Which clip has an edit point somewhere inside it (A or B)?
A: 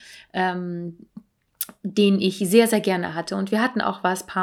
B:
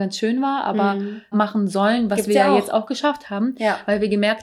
B